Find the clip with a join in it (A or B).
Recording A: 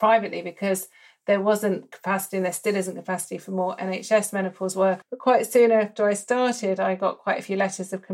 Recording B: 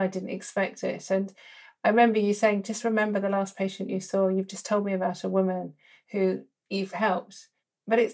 A